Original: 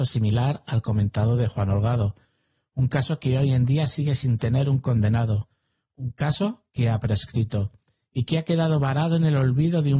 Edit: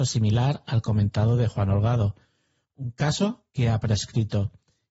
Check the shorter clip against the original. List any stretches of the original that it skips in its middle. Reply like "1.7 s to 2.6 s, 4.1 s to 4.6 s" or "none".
2.6 s to 5.8 s